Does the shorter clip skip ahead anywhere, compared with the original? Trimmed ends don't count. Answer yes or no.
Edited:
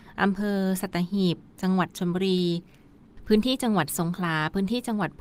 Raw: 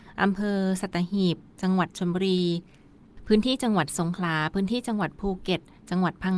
no